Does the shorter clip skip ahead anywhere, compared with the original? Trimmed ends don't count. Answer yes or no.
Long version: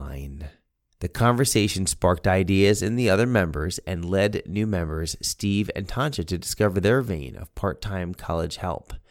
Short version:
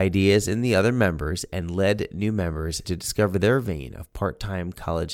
yes